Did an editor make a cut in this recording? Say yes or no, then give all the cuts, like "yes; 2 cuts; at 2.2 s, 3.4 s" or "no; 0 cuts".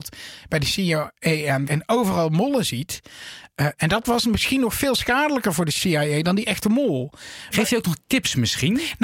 yes; 2 cuts; at 1.7 s, 7.5 s